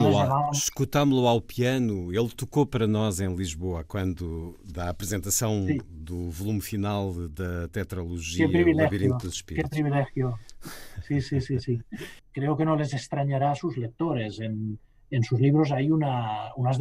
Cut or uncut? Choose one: cut